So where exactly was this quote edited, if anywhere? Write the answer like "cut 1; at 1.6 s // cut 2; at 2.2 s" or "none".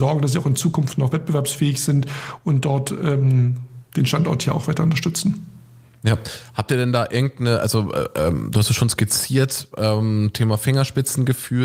none